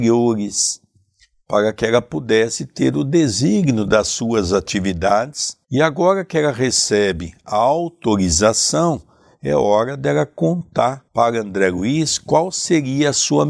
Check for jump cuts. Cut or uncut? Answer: cut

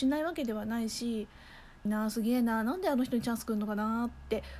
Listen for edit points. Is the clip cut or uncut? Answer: cut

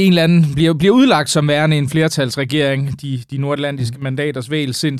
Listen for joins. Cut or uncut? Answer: uncut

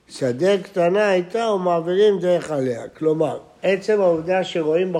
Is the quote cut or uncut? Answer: uncut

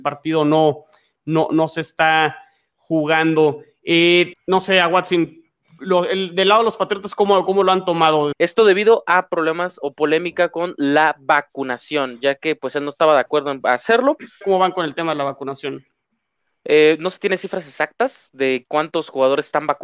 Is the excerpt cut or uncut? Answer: cut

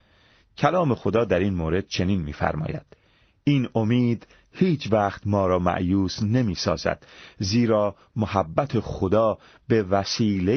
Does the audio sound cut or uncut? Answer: uncut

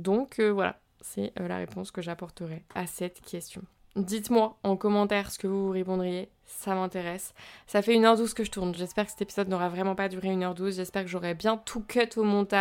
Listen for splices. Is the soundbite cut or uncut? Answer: uncut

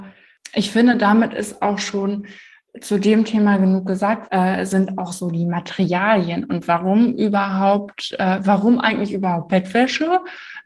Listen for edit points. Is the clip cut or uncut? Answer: cut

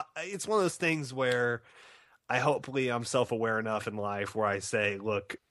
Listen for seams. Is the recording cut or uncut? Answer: uncut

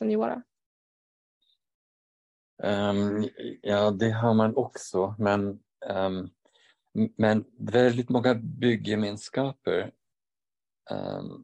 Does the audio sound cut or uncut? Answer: uncut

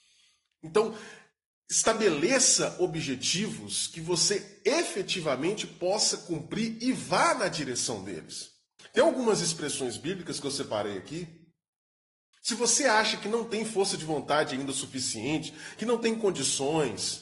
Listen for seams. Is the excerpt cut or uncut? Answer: cut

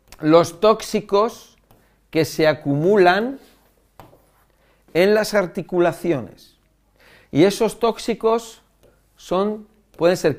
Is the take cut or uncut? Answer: uncut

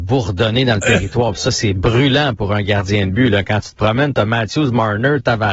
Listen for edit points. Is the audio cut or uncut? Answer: uncut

